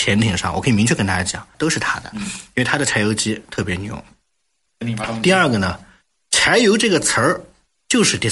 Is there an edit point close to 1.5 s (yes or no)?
yes